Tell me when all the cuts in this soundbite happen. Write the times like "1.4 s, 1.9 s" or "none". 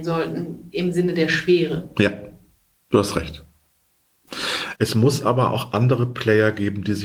4.8 s